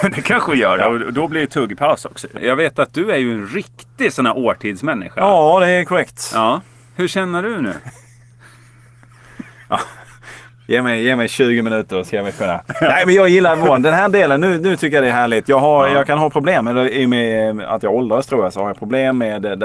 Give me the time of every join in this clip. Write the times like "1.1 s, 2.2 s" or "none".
2.4 s